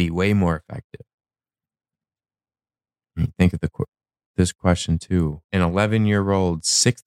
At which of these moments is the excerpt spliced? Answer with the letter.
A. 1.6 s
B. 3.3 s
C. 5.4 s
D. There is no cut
C